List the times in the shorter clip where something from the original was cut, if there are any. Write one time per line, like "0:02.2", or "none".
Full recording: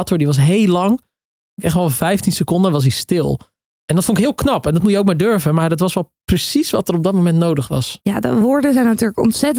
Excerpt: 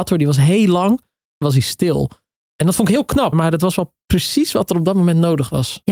0:01.4
0:03.3